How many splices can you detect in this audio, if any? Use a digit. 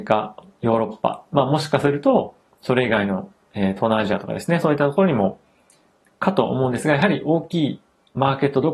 0